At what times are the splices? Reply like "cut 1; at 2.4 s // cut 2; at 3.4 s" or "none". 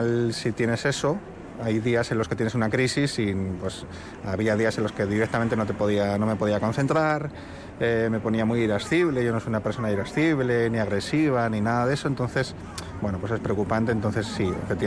none